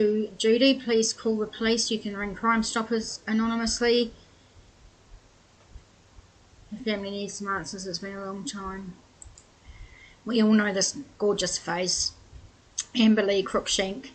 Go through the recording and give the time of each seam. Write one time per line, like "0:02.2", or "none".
none